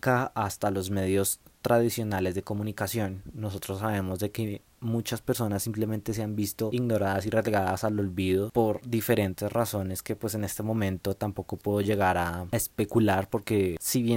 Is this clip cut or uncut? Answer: uncut